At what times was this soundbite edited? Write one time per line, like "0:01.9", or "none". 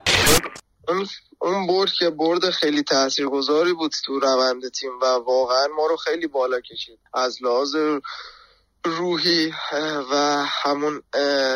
0:07.1